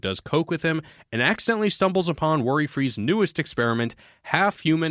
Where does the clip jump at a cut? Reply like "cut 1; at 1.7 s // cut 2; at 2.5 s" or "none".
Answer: none